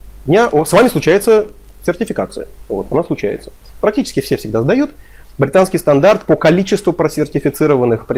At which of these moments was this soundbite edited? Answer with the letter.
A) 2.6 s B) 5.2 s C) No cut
B